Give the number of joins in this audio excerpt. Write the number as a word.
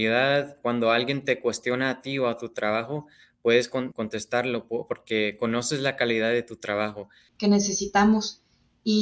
two